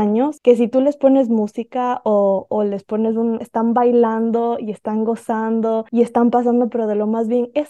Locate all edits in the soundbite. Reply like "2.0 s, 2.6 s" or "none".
3.4 s